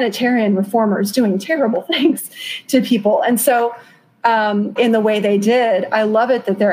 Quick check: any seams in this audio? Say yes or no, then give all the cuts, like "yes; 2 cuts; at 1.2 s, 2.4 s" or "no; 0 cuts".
yes; 1 cut; at 4.8 s